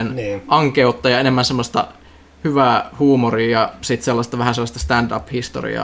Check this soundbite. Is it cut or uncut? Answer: uncut